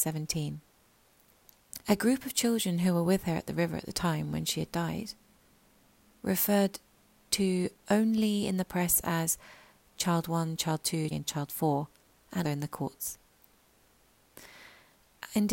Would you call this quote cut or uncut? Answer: cut